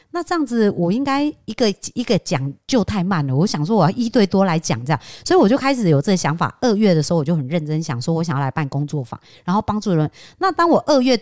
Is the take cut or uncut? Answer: uncut